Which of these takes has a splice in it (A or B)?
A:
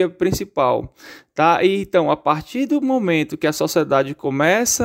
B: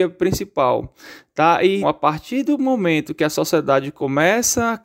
B